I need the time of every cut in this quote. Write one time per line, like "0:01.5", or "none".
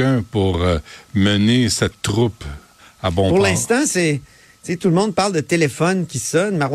none